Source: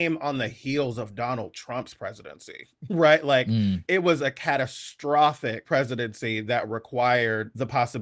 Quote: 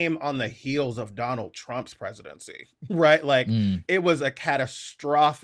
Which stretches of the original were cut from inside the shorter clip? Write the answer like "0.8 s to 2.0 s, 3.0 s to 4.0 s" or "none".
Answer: none